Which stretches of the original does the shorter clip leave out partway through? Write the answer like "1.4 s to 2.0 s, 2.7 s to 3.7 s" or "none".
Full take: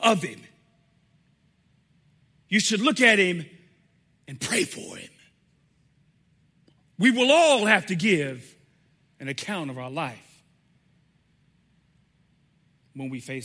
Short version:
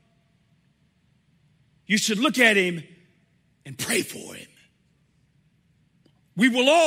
none